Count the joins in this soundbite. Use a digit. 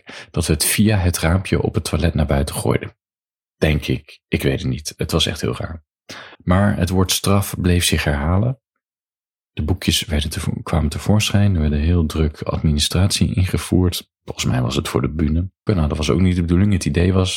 2